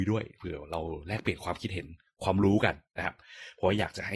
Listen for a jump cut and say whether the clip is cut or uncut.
uncut